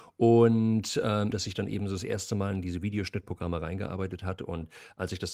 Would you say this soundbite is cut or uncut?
cut